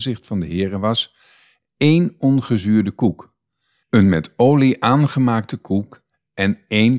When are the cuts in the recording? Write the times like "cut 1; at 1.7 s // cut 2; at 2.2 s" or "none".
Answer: none